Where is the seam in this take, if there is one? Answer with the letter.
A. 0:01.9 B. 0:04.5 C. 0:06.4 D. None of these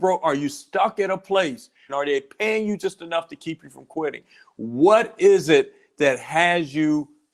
A